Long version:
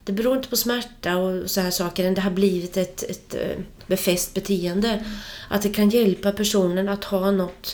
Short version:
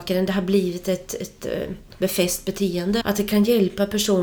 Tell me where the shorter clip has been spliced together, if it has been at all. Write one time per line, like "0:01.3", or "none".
0:03.0